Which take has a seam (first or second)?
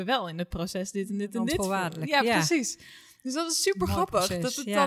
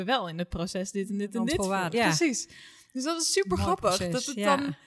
second